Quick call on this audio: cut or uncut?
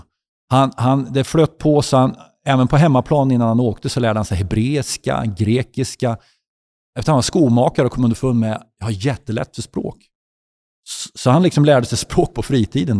uncut